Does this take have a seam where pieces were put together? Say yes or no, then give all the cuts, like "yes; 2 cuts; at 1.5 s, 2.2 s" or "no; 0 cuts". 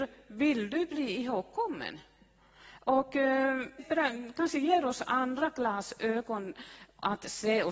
yes; 1 cut; at 3.8 s